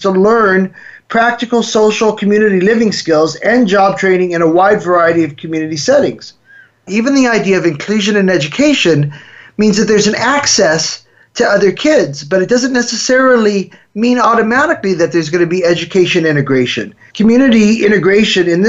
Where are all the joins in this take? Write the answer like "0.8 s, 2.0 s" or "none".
6.9 s, 17.1 s